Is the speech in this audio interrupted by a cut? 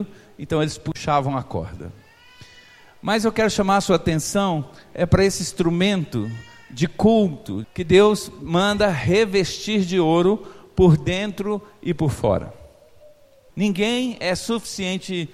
yes; 2 cuts; at 7.6 s, 13.5 s

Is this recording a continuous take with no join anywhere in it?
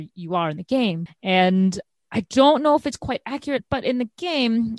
no; 1 cut; at 1.1 s

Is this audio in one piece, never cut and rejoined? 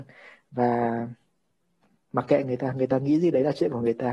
yes; 0 cuts

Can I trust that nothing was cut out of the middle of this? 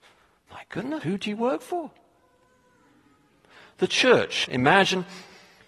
no; 2 cuts; at 1.0 s, 4.4 s

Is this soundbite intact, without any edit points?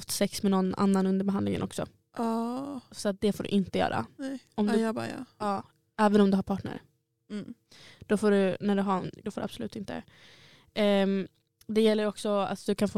no; 1 cut; at 9.2 s

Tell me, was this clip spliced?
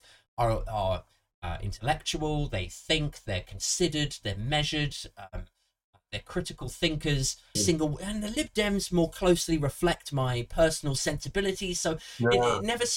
yes; 1 cut; at 7.6 s

